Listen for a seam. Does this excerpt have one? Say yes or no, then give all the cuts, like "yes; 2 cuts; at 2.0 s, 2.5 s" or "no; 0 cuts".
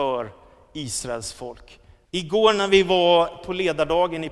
yes; 1 cut; at 2.0 s